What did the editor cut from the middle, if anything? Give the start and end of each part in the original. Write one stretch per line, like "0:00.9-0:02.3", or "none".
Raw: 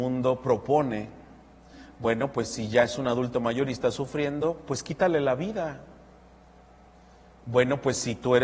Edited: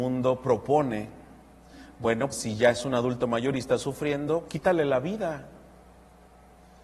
0:02.3-0:02.4
0:04.6-0:04.8